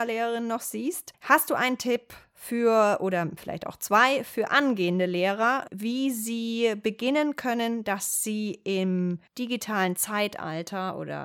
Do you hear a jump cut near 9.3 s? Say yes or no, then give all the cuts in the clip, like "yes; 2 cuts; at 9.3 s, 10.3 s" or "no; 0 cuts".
yes; 1 cut; at 9.3 s